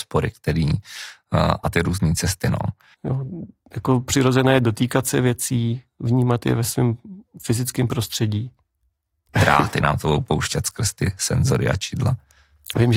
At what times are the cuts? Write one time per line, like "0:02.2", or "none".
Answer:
0:02.9
0:09.3

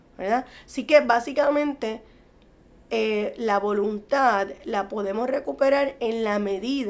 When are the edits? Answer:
none

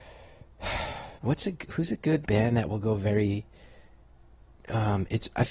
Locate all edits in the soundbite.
0:01.2
0:02.2

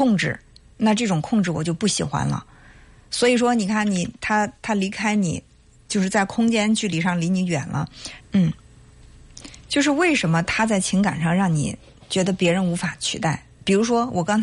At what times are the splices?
0:08.2

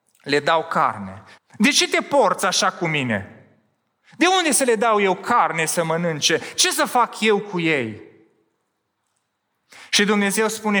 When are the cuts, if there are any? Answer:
0:01.4

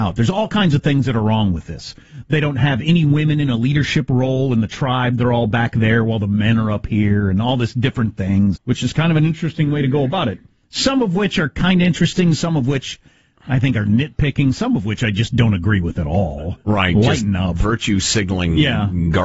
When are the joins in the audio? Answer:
0:08.6

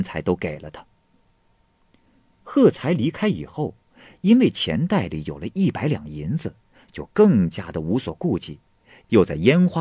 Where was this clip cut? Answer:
none

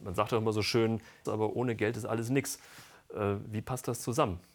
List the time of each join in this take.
0:01.3

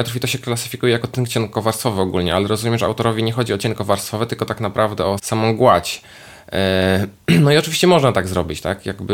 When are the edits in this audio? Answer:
0:05.2

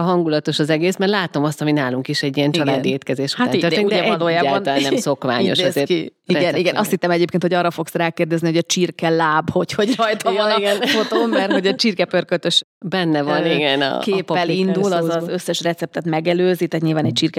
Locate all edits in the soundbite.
none

